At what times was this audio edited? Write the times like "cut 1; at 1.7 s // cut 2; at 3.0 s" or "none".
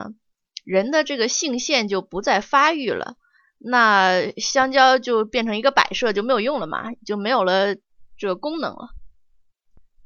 none